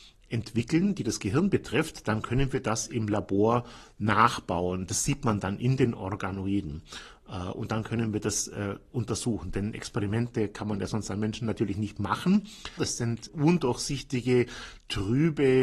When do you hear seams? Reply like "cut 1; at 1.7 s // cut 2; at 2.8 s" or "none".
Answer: cut 1; at 12.8 s